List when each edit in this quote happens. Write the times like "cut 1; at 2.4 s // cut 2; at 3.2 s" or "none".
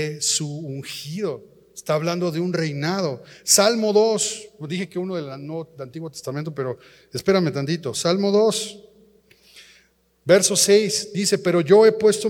none